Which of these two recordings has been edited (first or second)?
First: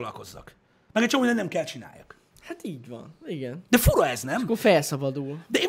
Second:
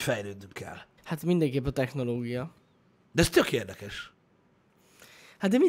second